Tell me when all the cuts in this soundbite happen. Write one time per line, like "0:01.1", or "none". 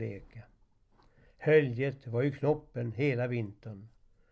none